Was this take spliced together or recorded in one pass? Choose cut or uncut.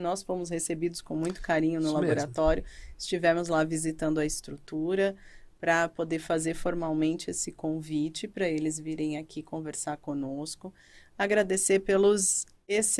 uncut